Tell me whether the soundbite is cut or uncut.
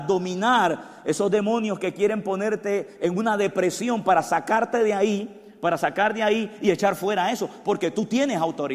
uncut